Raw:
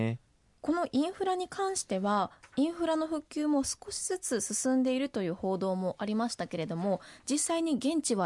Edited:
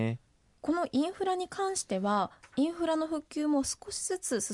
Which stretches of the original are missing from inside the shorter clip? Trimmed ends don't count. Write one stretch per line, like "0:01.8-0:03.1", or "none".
none